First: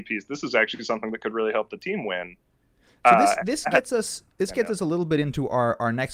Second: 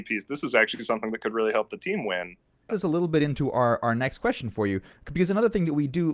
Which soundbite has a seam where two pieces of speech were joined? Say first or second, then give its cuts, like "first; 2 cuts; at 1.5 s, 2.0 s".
second; 1 cut; at 2.7 s